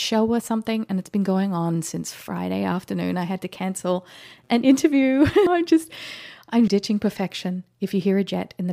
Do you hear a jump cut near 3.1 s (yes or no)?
no